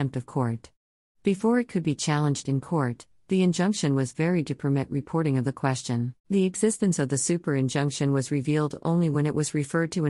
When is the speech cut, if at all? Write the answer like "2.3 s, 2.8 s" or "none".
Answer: 6.2 s